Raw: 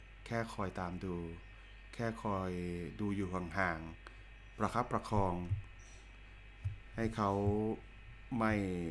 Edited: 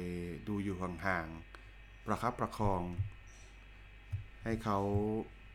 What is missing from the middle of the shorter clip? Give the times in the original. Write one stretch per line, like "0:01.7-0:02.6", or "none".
none